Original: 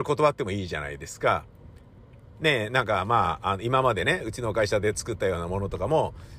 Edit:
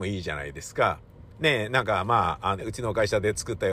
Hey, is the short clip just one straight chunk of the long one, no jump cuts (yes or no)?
no